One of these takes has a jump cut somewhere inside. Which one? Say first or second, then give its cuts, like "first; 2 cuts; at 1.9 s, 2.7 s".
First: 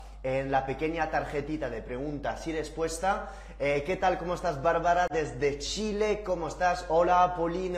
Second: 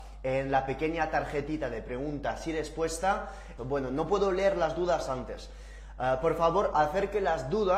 second; 1 cut; at 3.6 s